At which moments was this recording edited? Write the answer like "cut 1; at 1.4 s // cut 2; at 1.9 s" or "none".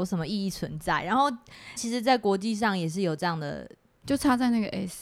cut 1; at 1.8 s // cut 2; at 4.0 s